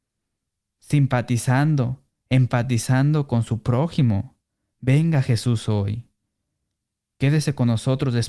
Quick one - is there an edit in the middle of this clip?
yes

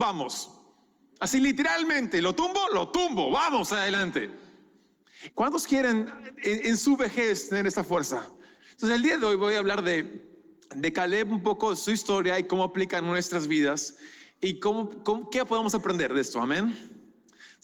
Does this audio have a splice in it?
yes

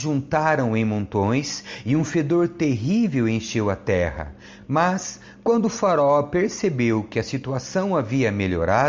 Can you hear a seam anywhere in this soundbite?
no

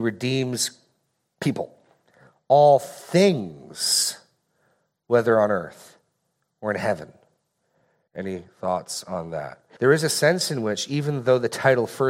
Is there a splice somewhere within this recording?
yes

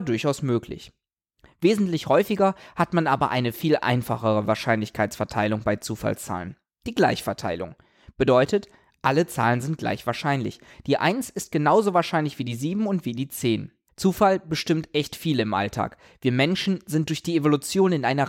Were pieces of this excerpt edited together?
yes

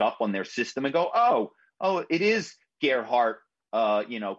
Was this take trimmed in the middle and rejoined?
no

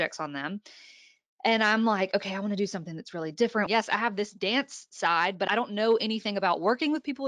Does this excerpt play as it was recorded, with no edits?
no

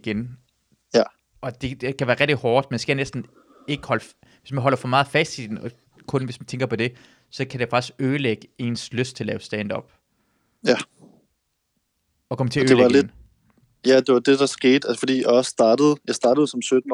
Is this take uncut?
yes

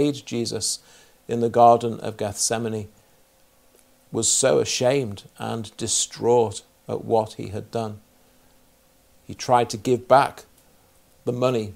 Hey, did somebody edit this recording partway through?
no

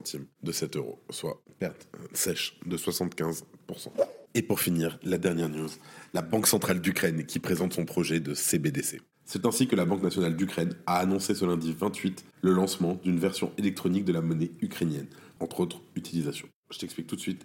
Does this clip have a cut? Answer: yes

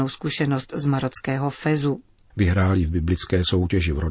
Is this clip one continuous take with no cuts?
no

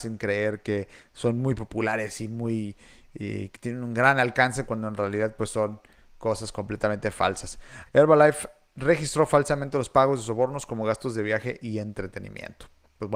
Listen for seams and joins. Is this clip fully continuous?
no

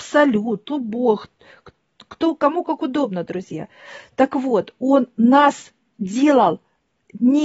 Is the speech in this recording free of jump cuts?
yes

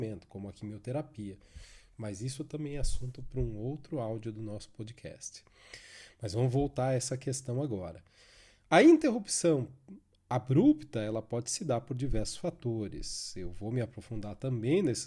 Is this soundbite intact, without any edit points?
yes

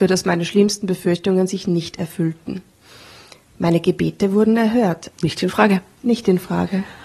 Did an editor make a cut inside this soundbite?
yes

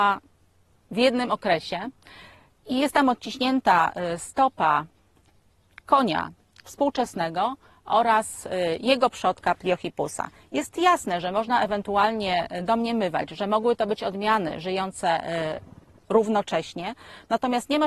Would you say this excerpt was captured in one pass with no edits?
yes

